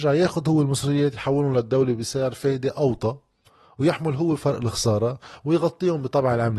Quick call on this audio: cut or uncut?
uncut